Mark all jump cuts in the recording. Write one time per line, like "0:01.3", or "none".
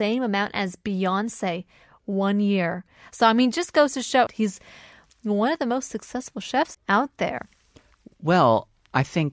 0:04.3
0:06.7